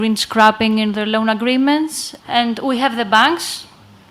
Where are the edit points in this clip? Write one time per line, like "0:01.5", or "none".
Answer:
0:02.2